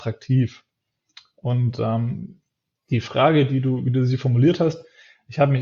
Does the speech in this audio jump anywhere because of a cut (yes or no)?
no